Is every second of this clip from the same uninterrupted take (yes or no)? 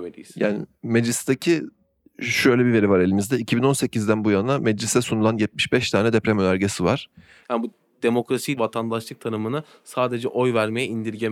no